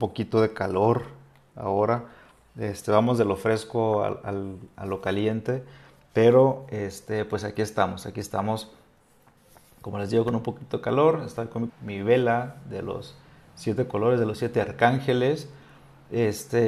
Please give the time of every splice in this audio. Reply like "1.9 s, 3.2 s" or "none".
11.7 s

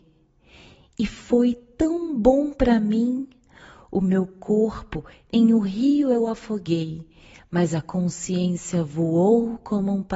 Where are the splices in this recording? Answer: none

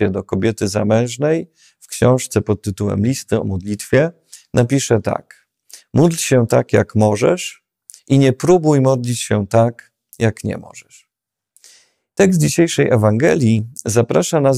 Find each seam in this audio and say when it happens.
none

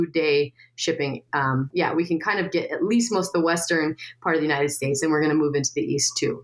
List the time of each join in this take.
1.7 s

